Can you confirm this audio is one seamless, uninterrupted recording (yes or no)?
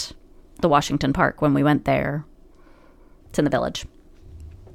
no